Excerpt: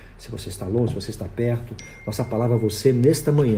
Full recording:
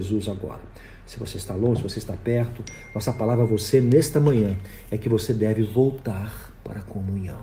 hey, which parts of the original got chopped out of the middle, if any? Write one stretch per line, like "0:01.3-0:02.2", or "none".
none